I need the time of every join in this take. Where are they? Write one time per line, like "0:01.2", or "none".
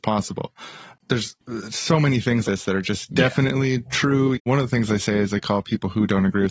0:02.4
0:04.3